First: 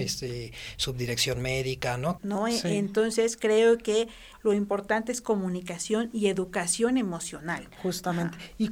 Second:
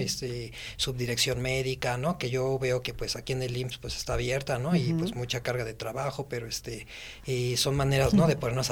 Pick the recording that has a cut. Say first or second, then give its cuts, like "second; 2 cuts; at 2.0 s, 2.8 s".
first; 2 cuts; at 2.2 s, 4.3 s